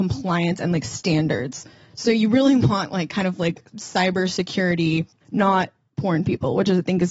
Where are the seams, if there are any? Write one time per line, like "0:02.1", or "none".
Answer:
0:05.2